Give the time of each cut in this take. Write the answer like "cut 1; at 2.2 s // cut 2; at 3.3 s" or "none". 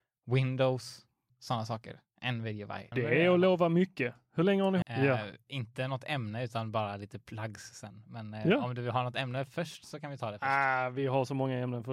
cut 1; at 1.3 s // cut 2; at 2.9 s // cut 3; at 4.8 s